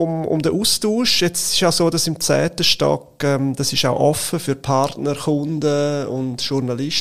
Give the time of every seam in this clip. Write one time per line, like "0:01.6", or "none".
none